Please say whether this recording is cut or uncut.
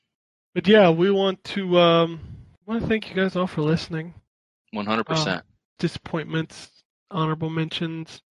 cut